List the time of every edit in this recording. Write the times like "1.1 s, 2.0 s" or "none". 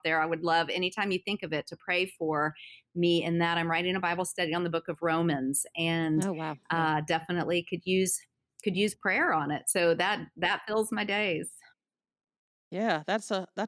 none